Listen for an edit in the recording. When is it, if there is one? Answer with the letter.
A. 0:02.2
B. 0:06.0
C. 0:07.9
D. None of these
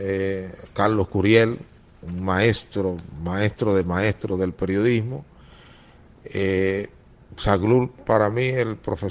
D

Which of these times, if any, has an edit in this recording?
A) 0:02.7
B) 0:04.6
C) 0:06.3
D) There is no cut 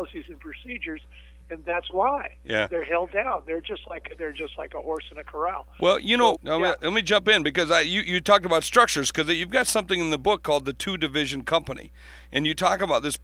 C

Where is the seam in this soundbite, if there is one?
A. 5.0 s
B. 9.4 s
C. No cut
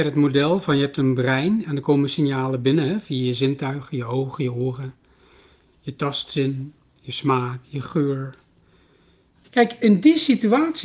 B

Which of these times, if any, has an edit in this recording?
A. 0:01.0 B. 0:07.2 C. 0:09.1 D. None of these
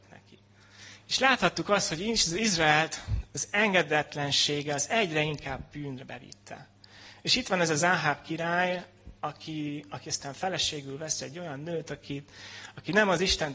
A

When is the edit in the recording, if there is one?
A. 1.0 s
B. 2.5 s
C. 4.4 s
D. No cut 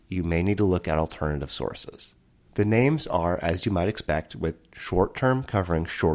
B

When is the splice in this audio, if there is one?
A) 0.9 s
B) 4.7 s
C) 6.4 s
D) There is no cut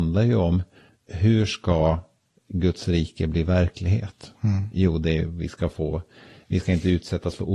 A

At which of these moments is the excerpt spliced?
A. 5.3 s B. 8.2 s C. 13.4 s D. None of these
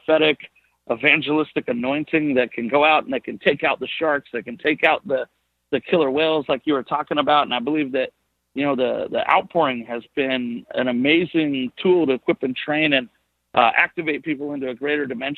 D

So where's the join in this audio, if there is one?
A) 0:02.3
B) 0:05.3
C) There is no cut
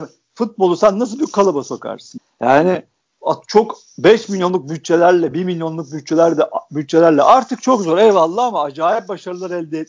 C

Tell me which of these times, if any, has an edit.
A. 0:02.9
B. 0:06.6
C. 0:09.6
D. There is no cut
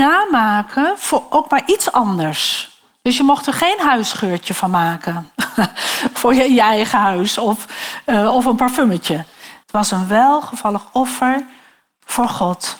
C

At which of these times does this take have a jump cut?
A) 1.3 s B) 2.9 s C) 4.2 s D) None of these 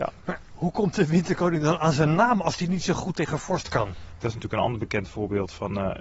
C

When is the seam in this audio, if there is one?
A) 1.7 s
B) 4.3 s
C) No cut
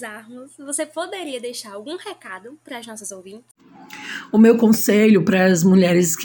C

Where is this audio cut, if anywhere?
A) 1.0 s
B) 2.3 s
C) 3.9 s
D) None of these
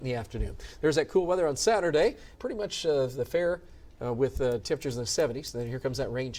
B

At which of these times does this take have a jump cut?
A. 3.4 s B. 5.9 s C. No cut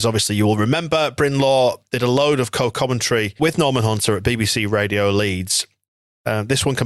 A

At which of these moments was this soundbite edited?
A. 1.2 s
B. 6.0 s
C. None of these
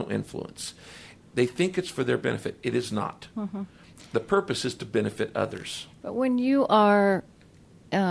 A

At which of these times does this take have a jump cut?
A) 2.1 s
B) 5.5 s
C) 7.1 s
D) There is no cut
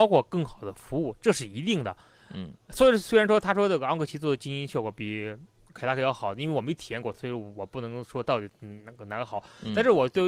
D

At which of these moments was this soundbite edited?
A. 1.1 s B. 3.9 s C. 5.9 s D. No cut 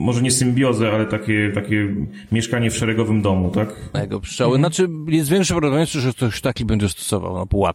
B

